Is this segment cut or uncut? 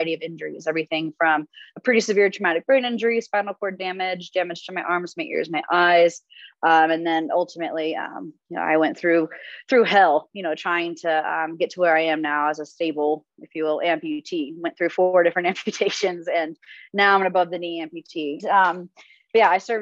cut